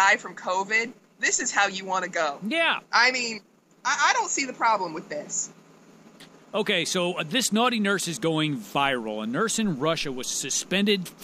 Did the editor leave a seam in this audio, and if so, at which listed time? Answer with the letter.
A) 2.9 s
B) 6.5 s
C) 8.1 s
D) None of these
D